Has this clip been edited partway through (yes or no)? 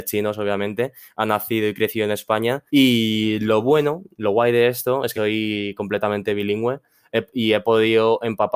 yes